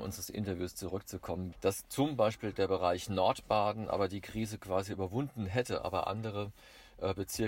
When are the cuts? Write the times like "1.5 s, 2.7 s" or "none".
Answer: 1.5 s